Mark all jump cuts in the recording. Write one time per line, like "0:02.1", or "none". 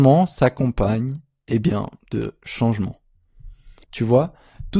0:03.8